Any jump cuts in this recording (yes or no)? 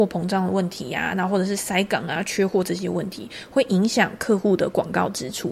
no